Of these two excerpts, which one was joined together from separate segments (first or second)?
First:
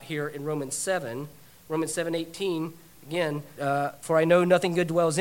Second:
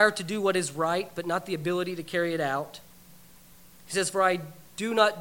first